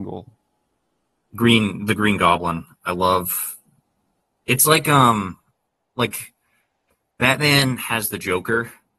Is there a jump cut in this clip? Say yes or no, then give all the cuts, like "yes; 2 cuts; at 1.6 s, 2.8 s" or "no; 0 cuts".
no; 0 cuts